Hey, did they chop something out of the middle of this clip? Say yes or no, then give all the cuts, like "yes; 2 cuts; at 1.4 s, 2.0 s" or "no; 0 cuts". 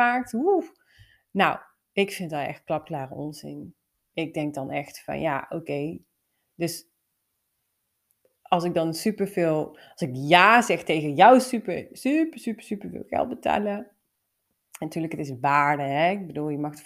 no; 0 cuts